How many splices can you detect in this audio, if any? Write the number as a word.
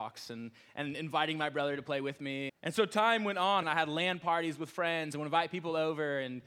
two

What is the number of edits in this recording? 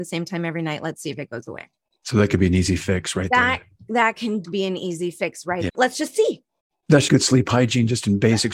three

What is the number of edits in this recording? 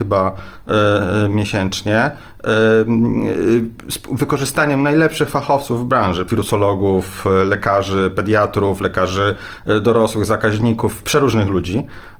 one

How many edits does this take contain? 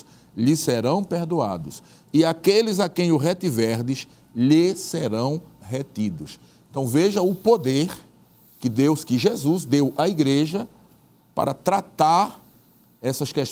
zero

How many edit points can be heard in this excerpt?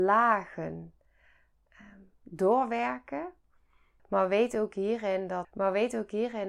two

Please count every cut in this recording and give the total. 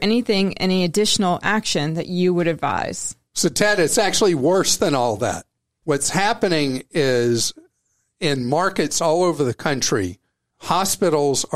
zero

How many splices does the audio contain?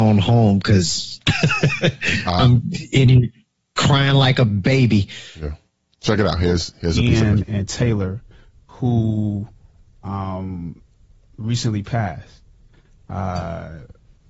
zero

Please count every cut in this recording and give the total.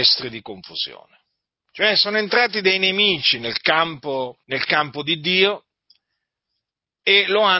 two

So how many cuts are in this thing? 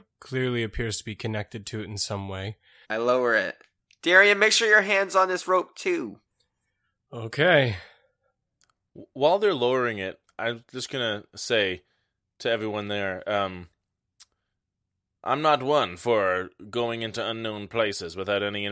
one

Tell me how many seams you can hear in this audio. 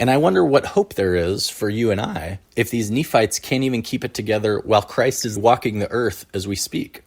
two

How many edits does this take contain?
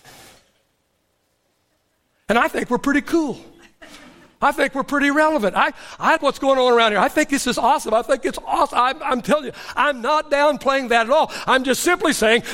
one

